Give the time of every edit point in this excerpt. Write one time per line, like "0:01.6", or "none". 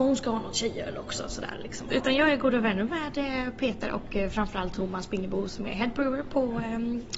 0:01.9